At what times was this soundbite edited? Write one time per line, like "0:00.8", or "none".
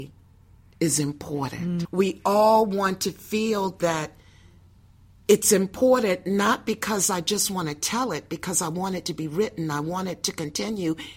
0:01.8